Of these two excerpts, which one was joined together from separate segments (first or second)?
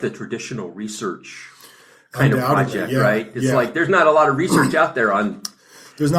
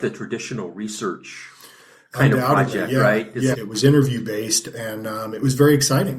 second